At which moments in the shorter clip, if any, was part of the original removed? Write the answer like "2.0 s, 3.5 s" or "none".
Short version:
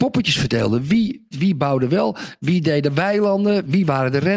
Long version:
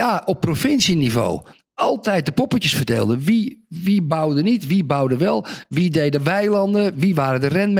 1.3 s